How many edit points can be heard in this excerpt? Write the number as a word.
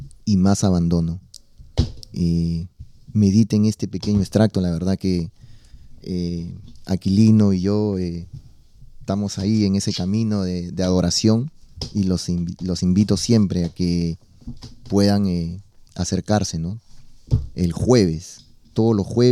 zero